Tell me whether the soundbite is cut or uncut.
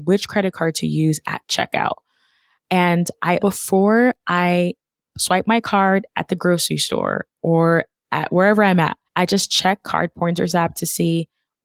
cut